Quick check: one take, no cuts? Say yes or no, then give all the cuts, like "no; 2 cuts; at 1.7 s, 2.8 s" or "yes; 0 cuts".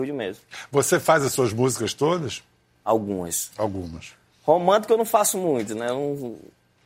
yes; 0 cuts